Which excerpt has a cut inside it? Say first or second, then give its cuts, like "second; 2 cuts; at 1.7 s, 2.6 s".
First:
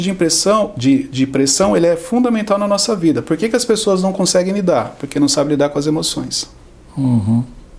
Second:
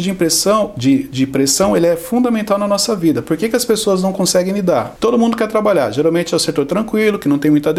second; 1 cut; at 5.0 s